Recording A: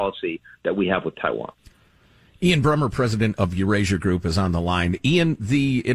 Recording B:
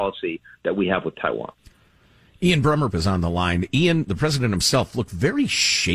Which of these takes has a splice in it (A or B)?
B